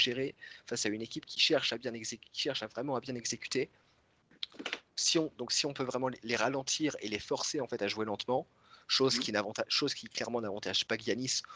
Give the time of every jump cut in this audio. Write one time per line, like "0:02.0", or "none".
none